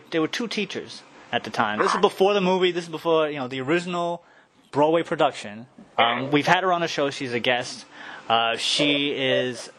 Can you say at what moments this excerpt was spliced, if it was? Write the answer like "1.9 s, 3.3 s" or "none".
1.8 s, 5.9 s